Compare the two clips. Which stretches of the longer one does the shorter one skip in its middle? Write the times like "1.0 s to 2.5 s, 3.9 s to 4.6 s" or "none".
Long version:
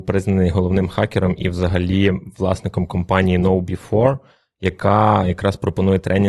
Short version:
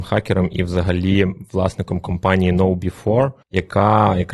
4.3 s to 4.5 s